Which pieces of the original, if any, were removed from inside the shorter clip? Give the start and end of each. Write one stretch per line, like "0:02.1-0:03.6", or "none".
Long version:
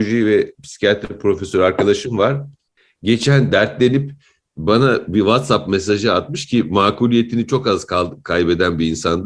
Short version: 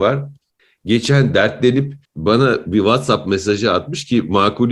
0:04.2-0:04.5